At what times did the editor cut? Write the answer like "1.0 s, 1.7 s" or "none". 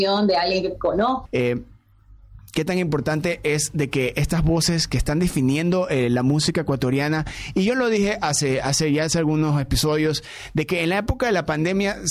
1.3 s

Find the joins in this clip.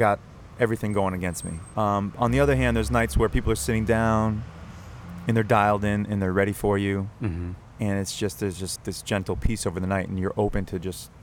1.7 s, 8.8 s

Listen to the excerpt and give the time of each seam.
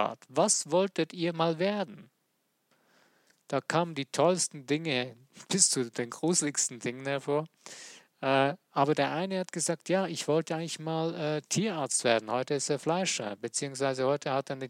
none

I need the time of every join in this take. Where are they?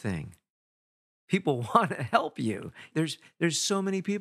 2.9 s

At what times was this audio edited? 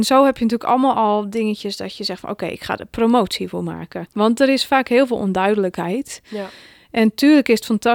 4.1 s

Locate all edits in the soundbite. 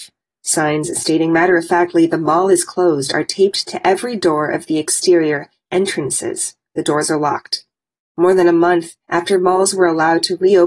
none

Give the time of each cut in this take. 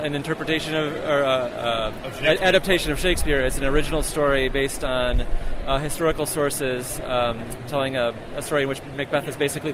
none

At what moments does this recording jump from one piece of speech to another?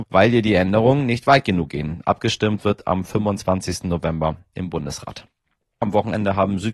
5.8 s

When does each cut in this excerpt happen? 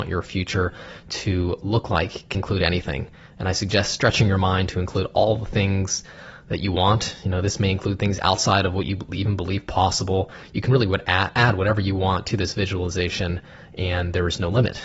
2.3 s

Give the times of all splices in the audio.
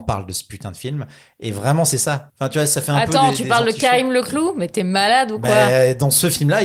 2.3 s

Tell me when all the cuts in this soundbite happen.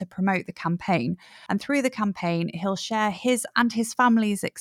1.5 s

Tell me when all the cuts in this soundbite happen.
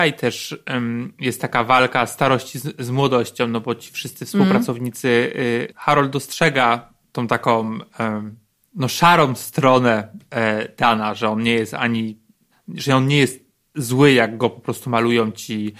5.7 s

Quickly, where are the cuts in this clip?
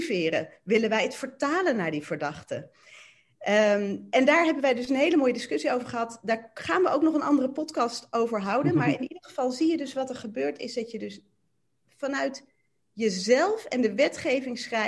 none

